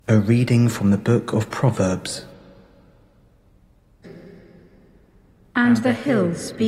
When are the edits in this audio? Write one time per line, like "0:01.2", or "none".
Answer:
0:04.0